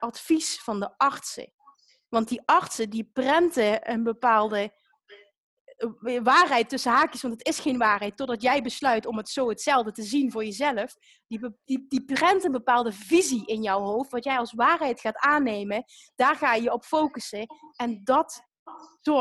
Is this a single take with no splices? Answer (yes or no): yes